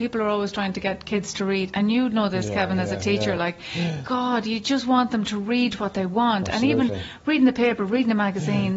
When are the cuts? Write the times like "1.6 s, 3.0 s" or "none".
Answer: none